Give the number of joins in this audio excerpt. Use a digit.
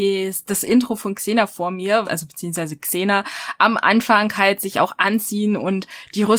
1